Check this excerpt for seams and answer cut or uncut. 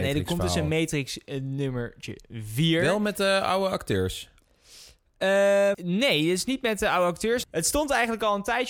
cut